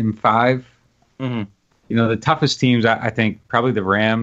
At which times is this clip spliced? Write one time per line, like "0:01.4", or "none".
0:01.7